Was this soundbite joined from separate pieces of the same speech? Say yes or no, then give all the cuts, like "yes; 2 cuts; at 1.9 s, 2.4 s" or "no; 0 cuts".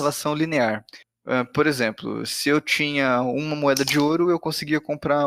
no; 0 cuts